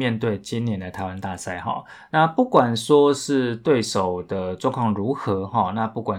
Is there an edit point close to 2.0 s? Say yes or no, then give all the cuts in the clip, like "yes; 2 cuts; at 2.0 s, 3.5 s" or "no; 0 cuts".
no; 0 cuts